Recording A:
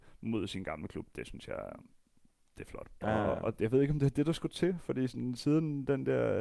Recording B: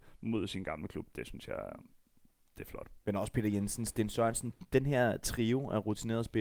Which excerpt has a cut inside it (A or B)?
A